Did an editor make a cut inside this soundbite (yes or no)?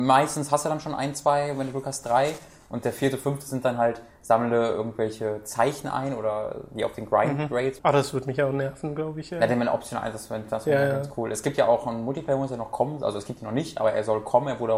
yes